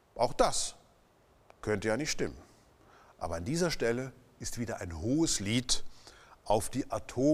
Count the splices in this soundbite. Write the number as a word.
zero